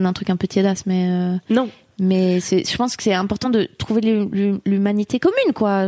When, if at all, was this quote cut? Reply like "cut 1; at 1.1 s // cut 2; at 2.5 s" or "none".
cut 1; at 3.4 s